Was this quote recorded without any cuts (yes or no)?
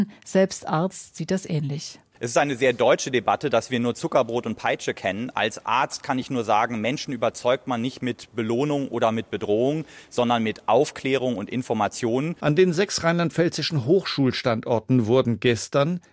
no